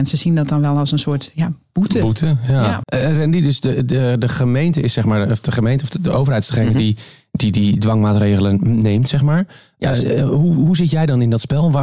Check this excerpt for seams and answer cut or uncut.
cut